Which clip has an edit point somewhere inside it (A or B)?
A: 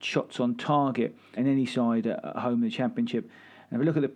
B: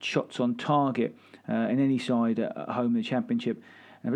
A